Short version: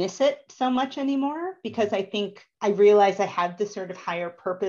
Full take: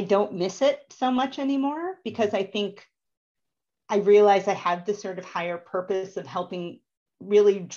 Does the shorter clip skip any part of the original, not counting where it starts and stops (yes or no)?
yes